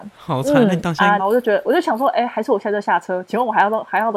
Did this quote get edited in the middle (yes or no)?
yes